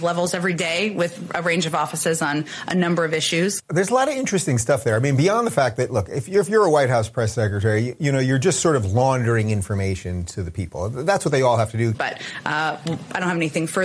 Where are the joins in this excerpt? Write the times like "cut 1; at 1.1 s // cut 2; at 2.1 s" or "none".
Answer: cut 1; at 3.6 s // cut 2; at 11.9 s